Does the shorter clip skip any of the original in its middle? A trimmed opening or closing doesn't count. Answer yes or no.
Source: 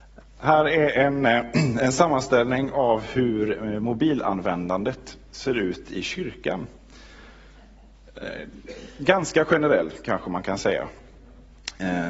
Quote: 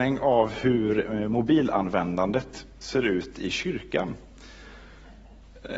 no